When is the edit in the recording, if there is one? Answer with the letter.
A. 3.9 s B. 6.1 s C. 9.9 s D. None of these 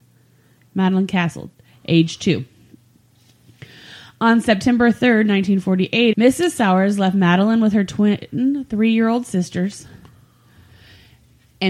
B